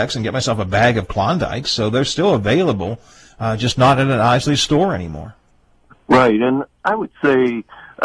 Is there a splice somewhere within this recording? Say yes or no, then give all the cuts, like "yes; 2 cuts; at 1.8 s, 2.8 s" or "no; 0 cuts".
no; 0 cuts